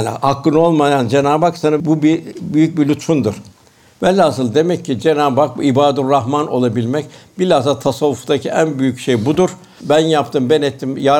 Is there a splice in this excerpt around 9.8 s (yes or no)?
yes